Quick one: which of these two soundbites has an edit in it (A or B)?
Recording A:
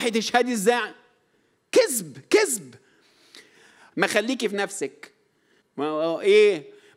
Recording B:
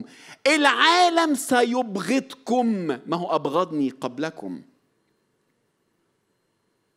A